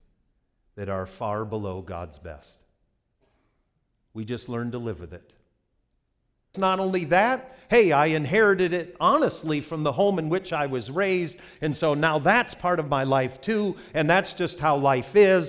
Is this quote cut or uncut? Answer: cut